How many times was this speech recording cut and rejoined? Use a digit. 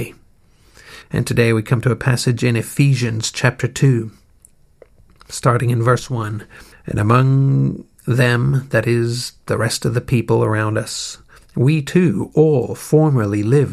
2